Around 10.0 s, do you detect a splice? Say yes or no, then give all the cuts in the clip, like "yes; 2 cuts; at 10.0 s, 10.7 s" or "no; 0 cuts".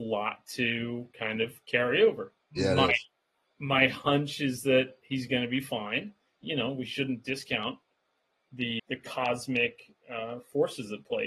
no; 3 cuts; at 2.4 s, 6.4 s, 8.8 s